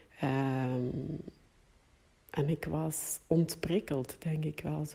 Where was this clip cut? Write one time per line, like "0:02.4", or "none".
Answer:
none

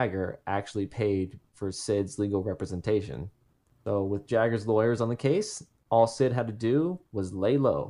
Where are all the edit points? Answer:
none

